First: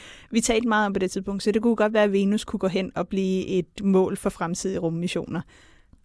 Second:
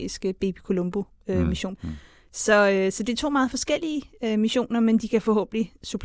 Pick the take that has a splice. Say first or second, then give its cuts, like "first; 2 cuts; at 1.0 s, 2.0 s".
second; 1 cut; at 1.8 s